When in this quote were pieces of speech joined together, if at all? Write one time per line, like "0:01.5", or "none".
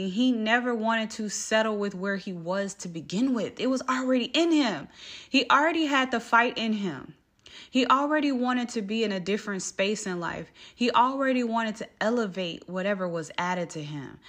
none